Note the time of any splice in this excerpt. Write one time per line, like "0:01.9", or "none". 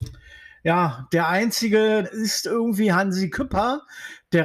0:02.0